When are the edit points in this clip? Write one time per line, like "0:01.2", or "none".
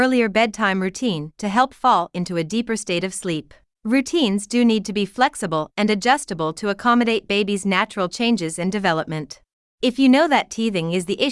0:03.7
0:09.8